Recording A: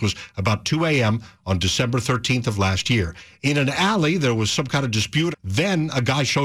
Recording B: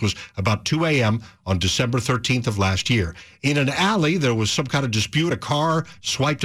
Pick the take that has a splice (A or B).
A